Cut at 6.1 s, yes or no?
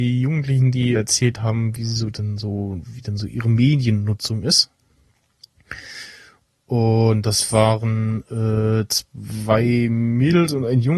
no